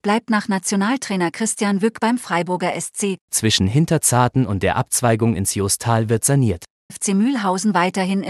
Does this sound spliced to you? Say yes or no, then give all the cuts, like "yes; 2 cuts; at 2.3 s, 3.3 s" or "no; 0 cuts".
yes; 2 cuts; at 3.2 s, 6.9 s